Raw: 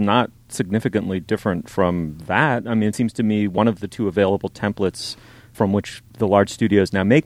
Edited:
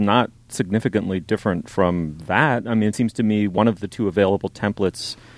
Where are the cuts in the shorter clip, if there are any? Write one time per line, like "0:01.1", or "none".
none